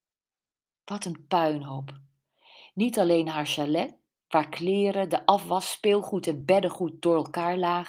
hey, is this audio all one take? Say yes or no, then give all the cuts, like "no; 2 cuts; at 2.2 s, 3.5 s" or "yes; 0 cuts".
yes; 0 cuts